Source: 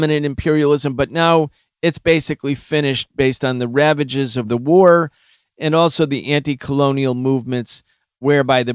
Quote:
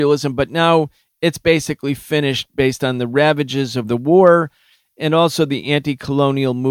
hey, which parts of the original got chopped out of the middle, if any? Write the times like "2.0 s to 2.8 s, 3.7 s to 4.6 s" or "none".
none